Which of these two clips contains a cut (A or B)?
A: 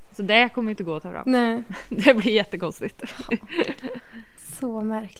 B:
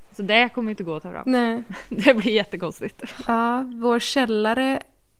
B